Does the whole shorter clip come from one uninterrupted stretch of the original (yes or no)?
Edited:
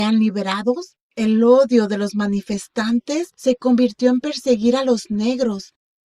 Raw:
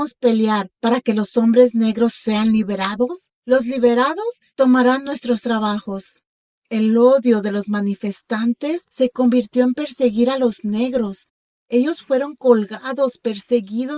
no